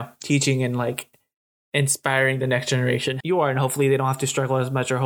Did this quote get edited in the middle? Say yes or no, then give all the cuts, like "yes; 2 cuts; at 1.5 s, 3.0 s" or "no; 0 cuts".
yes; 1 cut; at 3.2 s